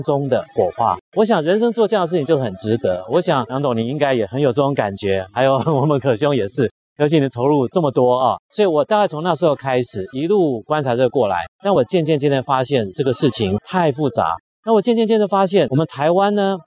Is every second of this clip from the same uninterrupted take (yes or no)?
yes